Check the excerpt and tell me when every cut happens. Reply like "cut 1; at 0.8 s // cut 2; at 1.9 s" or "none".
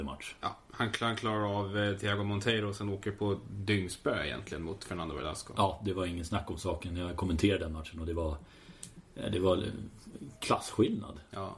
none